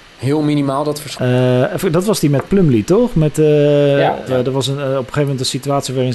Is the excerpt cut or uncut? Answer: cut